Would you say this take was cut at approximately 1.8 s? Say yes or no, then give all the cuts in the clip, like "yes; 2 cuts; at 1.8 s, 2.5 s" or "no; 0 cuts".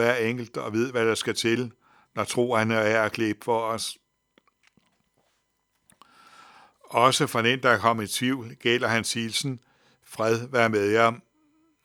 no; 0 cuts